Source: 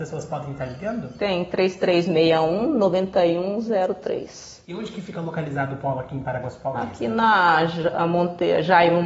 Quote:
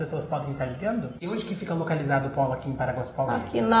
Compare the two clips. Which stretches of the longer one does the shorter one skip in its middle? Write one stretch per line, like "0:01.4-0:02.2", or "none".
0:01.2-0:04.7